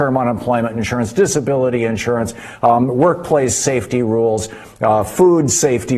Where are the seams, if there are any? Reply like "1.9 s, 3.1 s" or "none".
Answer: none